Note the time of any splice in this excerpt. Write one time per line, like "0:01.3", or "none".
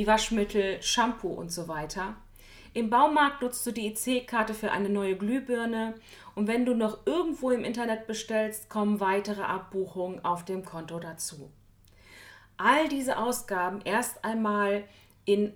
none